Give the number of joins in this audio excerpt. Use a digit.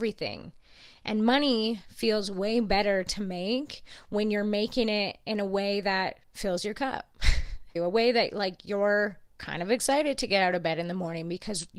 2